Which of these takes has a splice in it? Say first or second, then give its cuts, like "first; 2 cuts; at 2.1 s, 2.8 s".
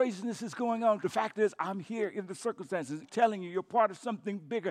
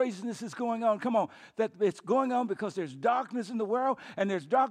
first; 2 cuts; at 1.0 s, 3.0 s